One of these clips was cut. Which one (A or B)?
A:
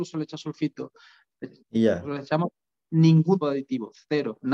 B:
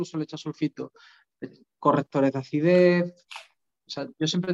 A